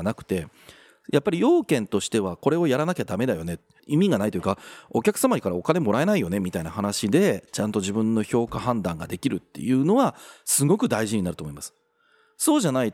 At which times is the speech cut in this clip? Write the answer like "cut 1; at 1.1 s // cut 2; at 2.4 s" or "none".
cut 1; at 3.8 s